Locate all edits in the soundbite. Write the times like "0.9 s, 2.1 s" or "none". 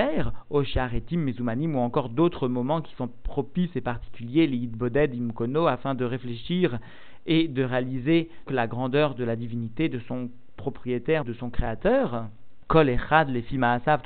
8.5 s, 11.2 s